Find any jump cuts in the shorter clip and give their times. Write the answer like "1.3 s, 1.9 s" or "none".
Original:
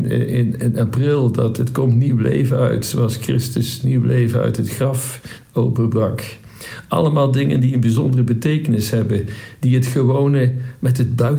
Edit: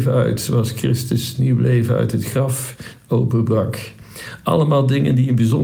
none